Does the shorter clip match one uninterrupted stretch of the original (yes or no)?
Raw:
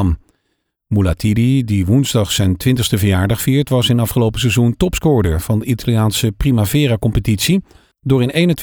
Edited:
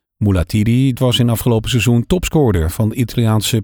no